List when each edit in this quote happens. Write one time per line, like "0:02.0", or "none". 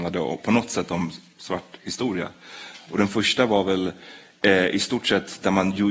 none